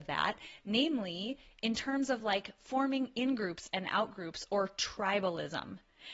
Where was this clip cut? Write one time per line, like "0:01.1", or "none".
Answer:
none